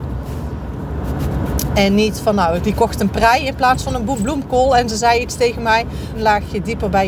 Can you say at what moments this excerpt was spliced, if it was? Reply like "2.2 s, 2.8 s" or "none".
2.6 s, 6.1 s

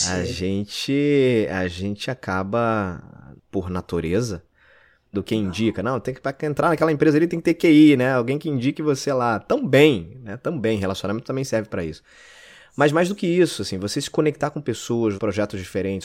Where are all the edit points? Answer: 3.4 s, 5.1 s, 15.2 s

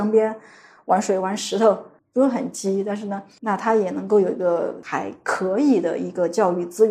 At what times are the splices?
2.0 s

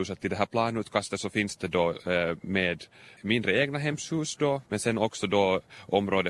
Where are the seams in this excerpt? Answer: 4.7 s

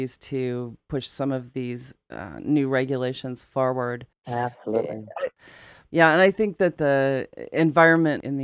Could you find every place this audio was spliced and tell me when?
none

